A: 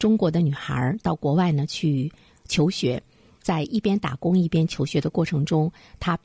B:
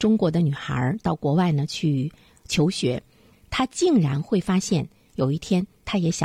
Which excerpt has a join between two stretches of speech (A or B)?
B